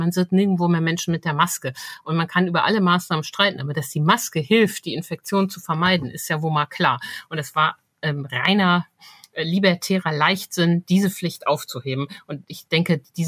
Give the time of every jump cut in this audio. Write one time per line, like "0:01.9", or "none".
none